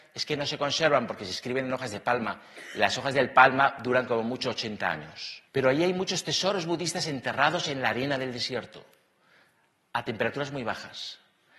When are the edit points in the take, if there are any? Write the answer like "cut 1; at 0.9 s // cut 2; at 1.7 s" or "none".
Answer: cut 1; at 5.5 s